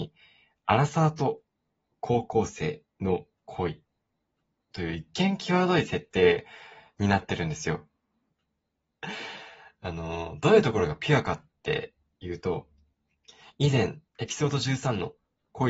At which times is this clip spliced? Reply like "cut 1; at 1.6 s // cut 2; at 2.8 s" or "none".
cut 1; at 8.3 s